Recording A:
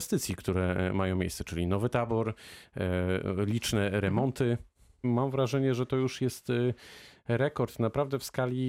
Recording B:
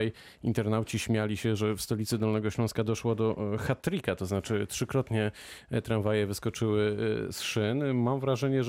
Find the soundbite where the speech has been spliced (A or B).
A